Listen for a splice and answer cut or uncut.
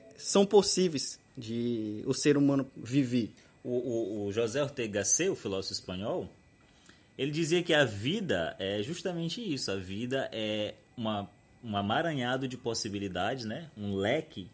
cut